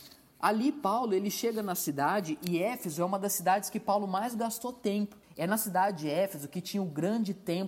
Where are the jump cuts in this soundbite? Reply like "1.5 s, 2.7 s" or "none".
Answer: 5.2 s

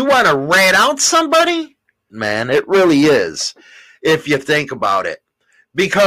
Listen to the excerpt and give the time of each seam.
2.1 s

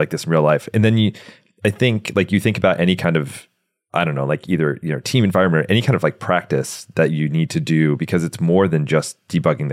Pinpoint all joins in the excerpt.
none

